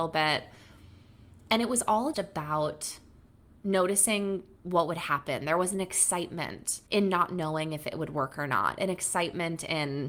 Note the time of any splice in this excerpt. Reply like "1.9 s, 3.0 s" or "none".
2.1 s, 6.9 s